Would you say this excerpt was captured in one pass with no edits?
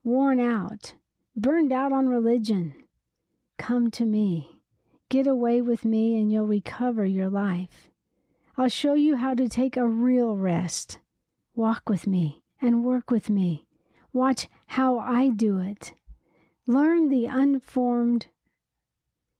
yes; 0 cuts

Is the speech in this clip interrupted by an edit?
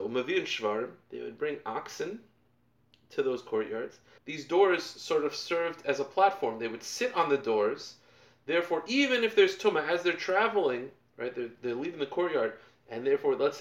yes; 1 cut; at 4.2 s

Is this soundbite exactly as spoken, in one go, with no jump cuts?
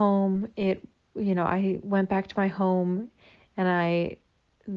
yes; 0 cuts

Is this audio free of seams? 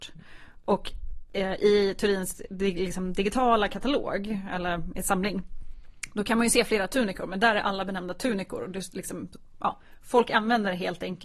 yes; 0 cuts

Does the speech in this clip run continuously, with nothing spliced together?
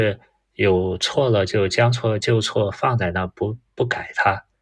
yes; 0 cuts

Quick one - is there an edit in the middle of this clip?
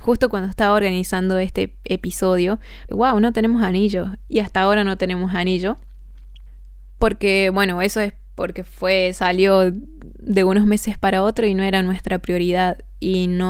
yes; 2 cuts; at 2.9 s, 4.3 s

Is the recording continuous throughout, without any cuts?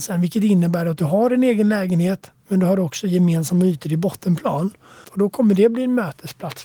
no; 1 cut; at 5.0 s

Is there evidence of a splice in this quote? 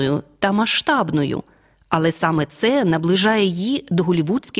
no; 0 cuts

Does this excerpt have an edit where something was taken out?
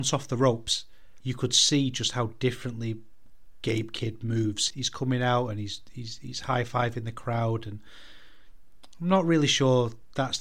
yes; 2 cuts; at 1.2 s, 4.7 s

